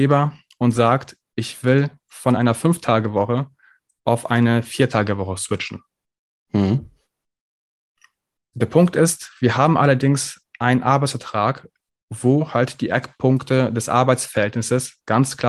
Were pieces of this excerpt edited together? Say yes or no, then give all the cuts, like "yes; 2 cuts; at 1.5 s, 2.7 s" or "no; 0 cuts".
no; 0 cuts